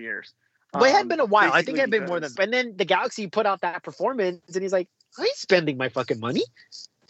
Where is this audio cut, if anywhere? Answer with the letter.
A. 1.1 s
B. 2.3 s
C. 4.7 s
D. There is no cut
B